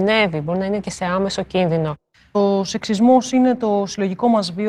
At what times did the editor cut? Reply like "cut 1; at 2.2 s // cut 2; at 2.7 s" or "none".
none